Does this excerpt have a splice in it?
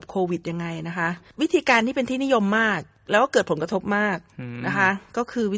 no; 0 cuts

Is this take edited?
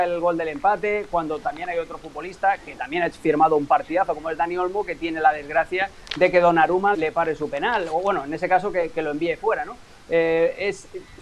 yes; 1 cut; at 6.9 s

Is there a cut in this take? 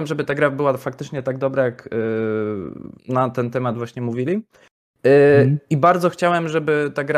yes; 1 cut; at 3.0 s

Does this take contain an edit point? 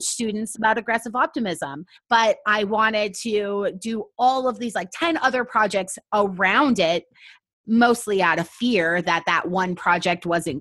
yes; 1 cut; at 1.9 s

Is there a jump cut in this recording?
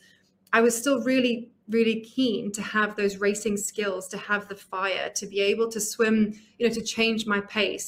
no; 0 cuts

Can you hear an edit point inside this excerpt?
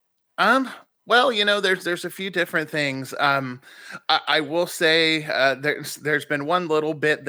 no; 0 cuts

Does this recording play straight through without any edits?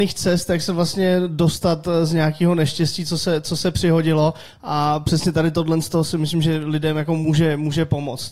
yes; 0 cuts

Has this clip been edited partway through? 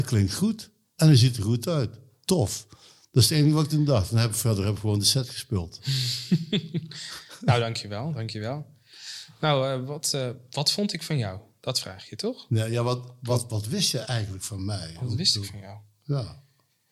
no; 0 cuts

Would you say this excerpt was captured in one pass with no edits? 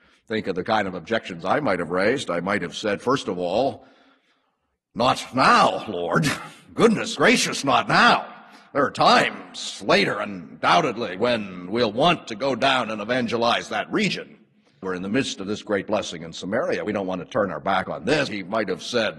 no; 2 cuts; at 14.8 s, 18.3 s

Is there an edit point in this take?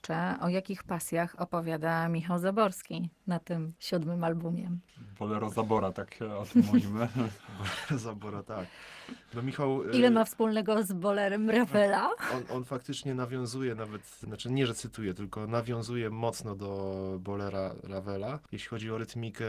no; 0 cuts

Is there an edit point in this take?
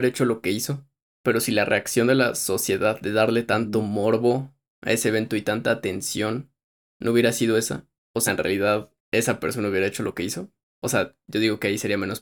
no; 0 cuts

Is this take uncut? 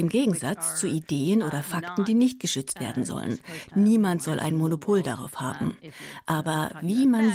no; 1 cut; at 3.7 s

